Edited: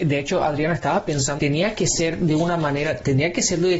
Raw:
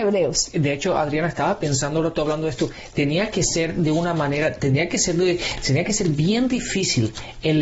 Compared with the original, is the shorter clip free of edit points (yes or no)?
no